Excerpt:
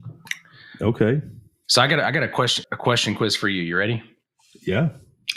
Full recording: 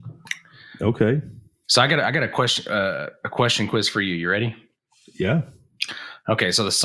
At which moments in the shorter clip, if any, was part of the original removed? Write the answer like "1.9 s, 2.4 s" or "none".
2.6 s